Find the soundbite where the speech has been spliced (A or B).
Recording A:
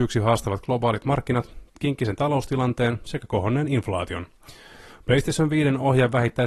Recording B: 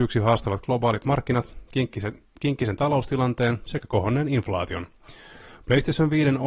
A